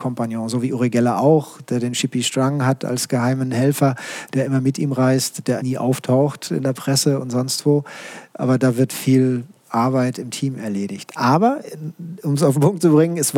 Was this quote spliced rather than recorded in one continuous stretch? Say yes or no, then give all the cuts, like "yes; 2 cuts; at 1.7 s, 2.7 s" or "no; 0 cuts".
yes; 1 cut; at 5.6 s